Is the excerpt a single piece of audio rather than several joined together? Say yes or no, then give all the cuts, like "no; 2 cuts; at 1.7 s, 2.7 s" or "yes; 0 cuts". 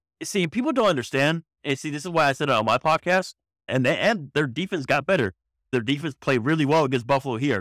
no; 1 cut; at 3.7 s